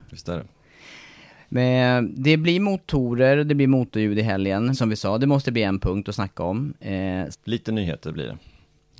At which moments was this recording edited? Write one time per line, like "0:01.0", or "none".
0:04.7
0:07.3